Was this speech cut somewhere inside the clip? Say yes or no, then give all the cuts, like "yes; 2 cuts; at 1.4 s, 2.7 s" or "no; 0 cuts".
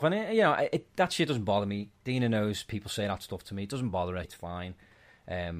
yes; 1 cut; at 4.2 s